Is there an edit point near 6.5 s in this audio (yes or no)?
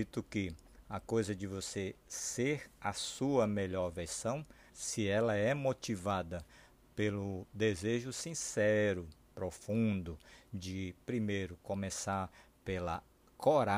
no